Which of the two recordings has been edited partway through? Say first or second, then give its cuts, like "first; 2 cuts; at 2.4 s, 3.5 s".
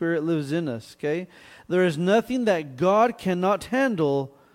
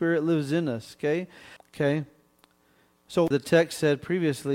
second; 2 cuts; at 1.6 s, 3.3 s